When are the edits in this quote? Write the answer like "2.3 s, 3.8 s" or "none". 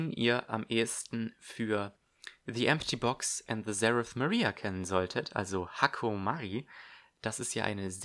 none